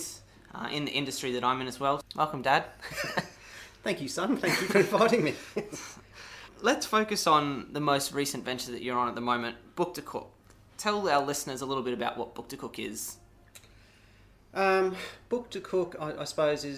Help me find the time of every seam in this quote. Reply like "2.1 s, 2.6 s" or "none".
2.0 s, 6.5 s